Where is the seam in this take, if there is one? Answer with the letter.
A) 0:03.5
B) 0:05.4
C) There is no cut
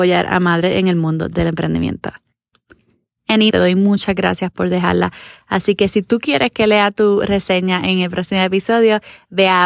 A